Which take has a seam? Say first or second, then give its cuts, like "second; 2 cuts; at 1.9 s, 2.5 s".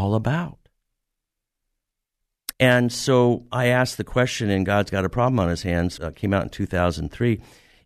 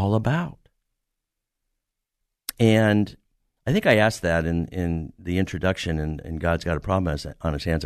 first; 2 cuts; at 2.5 s, 6.0 s